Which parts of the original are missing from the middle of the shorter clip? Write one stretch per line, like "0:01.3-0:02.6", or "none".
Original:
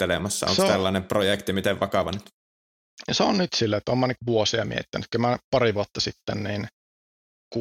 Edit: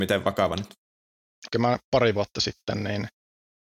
0:03.0-0:05.1